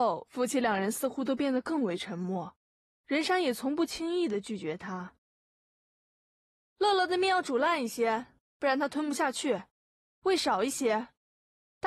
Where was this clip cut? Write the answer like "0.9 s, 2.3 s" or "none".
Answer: none